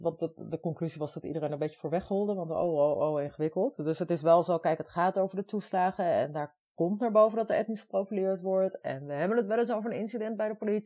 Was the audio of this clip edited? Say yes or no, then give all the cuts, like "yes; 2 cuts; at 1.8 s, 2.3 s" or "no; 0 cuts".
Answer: no; 0 cuts